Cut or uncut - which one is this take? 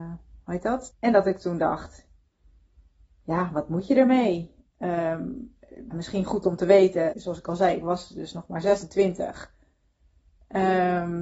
cut